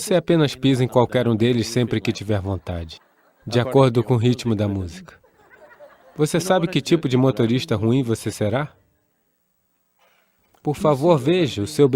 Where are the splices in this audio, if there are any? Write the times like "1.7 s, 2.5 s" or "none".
none